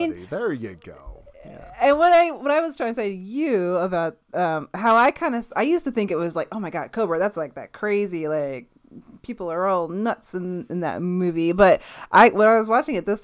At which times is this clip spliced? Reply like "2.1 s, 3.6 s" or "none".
none